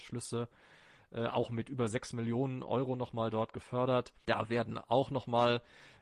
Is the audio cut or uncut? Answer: cut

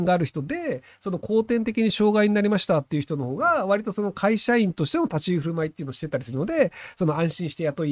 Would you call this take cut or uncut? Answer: uncut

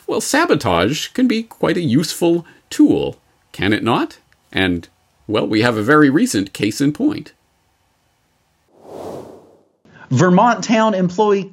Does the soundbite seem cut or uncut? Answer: uncut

